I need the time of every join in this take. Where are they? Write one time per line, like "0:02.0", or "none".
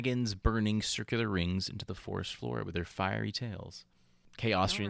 none